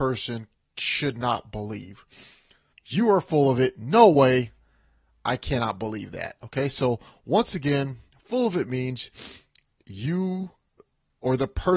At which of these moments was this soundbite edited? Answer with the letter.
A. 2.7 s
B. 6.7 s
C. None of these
A